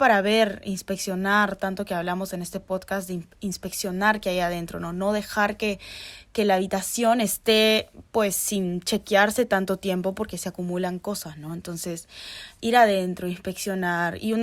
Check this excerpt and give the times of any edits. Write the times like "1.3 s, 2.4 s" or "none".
none